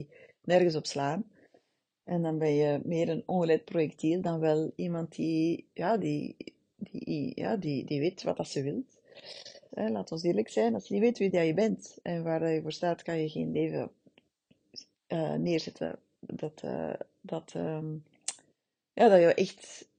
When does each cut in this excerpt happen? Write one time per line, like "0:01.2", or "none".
0:09.7